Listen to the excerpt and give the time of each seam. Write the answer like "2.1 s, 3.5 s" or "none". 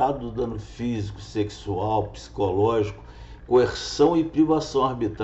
3.4 s